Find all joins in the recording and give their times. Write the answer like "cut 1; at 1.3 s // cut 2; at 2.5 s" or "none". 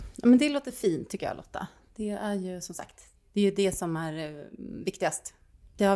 none